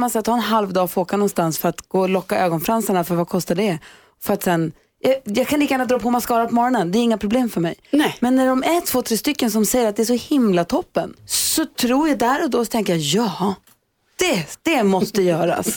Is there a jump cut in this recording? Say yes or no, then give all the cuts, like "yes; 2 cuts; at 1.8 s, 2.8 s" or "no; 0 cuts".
yes; 1 cut; at 11.2 s